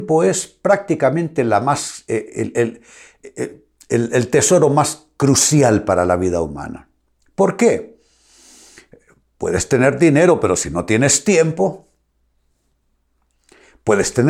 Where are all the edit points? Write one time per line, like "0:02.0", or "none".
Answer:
none

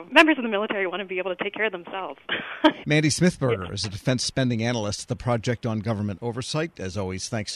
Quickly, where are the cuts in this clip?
0:02.8

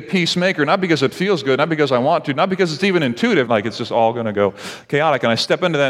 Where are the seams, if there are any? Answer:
0:03.5

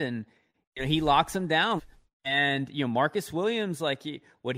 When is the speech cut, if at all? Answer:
0:01.8

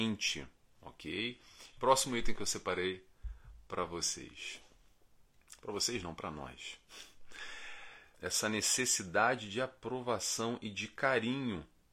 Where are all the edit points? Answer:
0:01.7
0:08.1

